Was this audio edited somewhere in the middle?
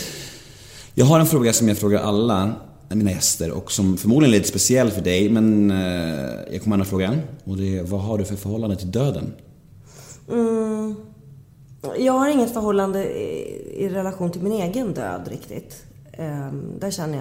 no; 0 cuts

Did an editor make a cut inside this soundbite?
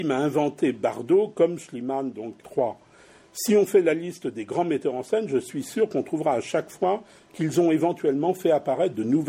yes; 1 cut; at 2.4 s

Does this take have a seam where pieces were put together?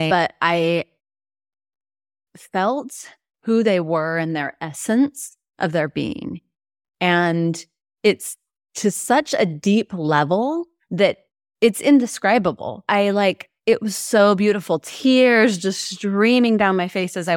no; 0 cuts

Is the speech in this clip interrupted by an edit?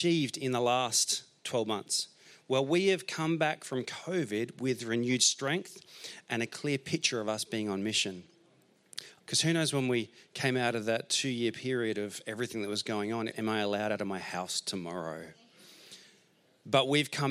yes; 2 cuts; at 9.2 s, 13.3 s

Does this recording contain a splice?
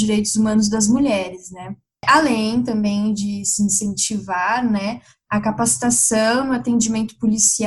no; 0 cuts

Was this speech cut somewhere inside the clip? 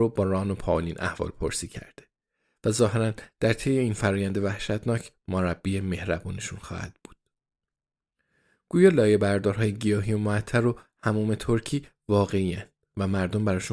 no; 0 cuts

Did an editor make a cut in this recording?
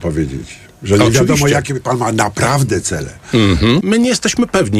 yes; 1 cut; at 3.8 s

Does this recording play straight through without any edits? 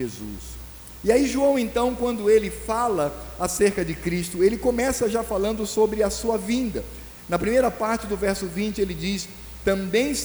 yes; 0 cuts

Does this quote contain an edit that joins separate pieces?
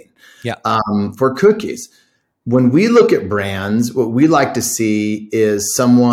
no; 0 cuts

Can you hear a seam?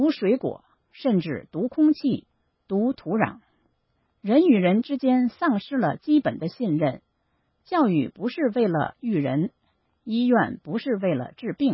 no; 0 cuts

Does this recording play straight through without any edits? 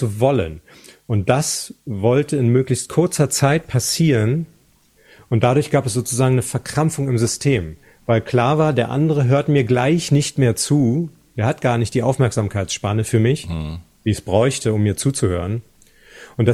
yes; 0 cuts

